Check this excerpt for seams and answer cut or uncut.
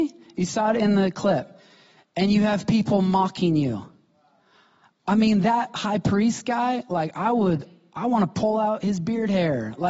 uncut